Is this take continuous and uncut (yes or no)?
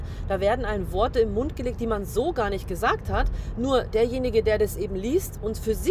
yes